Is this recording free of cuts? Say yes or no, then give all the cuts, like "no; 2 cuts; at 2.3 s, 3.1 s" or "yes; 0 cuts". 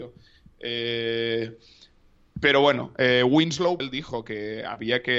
no; 1 cut; at 3.8 s